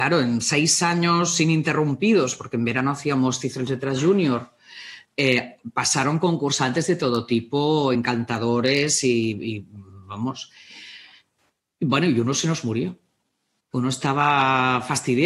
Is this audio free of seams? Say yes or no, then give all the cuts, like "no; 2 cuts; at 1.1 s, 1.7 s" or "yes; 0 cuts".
yes; 0 cuts